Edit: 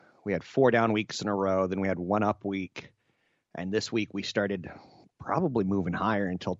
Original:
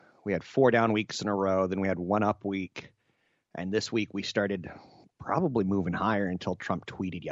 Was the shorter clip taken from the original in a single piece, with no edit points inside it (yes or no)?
yes